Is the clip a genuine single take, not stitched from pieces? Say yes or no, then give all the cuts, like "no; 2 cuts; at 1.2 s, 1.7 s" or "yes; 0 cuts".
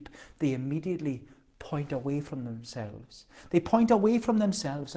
yes; 0 cuts